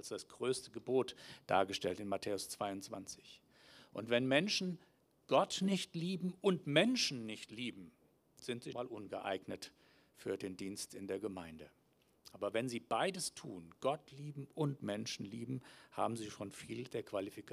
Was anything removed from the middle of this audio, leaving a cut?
yes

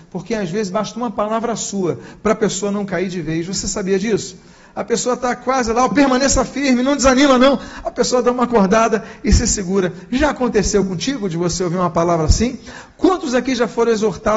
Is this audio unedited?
yes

